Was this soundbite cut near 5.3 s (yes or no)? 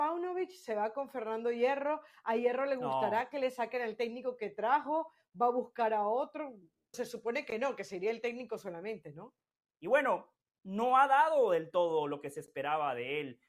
no